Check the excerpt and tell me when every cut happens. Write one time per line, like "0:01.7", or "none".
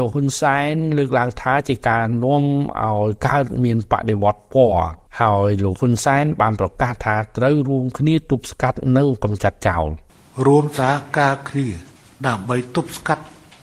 0:05.1